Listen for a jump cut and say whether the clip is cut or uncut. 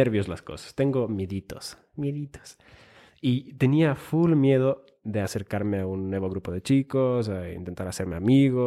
uncut